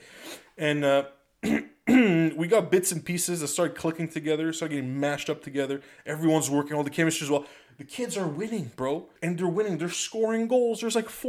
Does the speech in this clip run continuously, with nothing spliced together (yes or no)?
no